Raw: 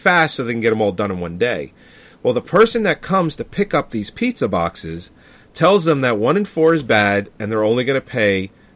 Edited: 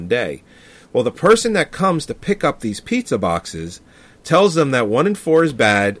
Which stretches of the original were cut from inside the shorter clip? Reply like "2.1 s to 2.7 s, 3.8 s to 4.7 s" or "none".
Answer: none